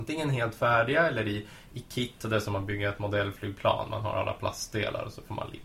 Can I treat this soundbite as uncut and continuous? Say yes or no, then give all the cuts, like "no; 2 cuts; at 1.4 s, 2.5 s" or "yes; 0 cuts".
yes; 0 cuts